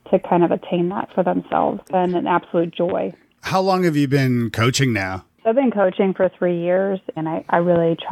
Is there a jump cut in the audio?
yes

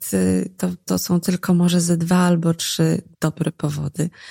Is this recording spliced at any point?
yes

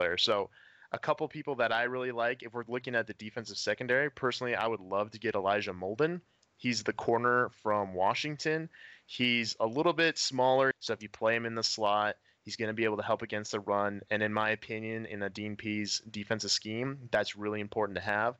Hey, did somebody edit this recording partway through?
yes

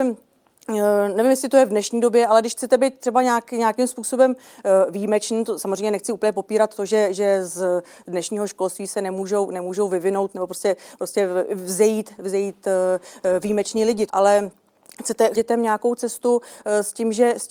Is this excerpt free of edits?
no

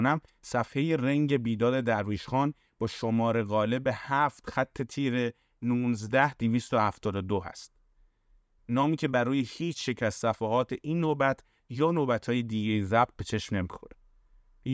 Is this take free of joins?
no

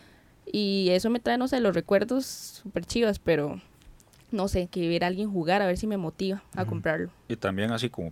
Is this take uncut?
no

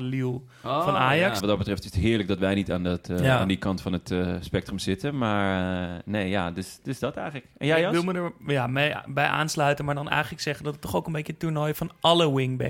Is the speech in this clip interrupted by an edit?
yes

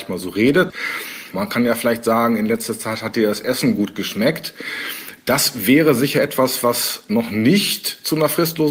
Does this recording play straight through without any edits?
no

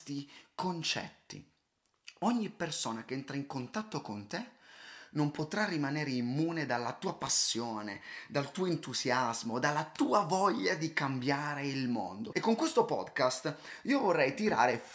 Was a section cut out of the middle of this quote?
yes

